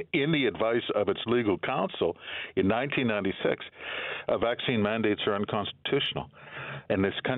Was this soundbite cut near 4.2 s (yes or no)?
no